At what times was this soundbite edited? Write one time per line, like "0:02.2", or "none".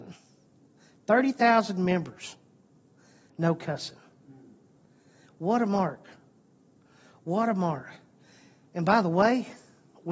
none